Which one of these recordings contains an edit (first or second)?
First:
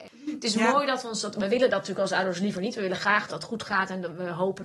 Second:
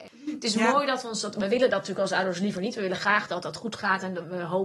first